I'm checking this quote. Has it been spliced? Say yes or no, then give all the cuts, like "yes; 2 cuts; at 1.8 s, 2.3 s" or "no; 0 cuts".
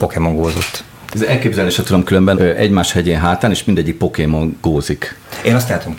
yes; 2 cuts; at 1.1 s, 2.3 s